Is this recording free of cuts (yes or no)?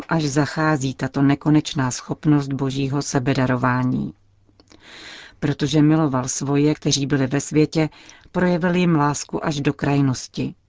yes